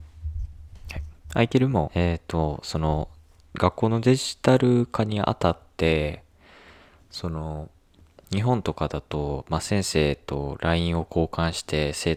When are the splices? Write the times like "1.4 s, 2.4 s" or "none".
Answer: 1.9 s